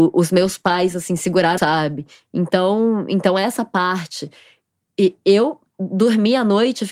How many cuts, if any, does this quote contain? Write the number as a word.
one